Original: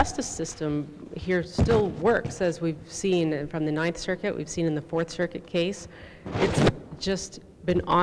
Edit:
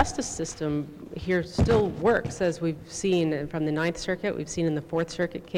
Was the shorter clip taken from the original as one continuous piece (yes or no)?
yes